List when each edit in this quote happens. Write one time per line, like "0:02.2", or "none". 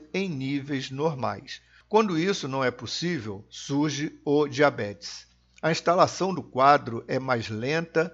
none